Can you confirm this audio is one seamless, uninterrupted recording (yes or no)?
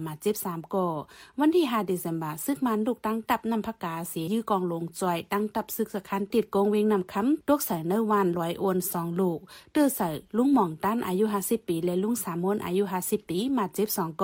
no